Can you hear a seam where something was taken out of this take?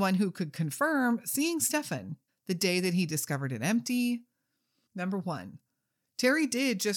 yes; 2 cuts; at 2.3 s, 4.9 s

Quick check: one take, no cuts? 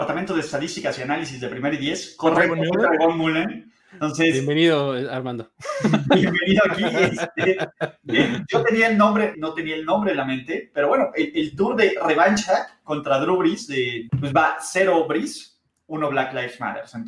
no; 2 cuts; at 9.3 s, 14.1 s

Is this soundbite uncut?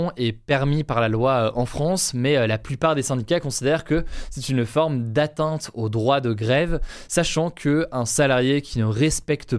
yes; 0 cuts

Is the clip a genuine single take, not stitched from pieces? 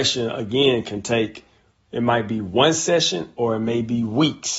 yes; 0 cuts

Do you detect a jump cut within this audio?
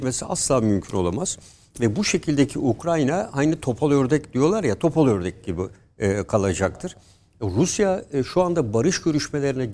no; 0 cuts

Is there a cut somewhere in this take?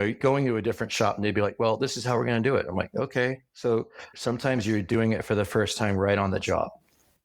no; 0 cuts

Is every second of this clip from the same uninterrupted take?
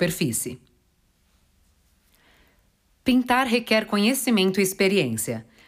yes; 0 cuts

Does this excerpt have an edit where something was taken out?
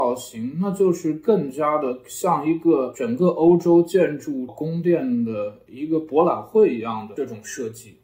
yes; 1 cut; at 4.5 s

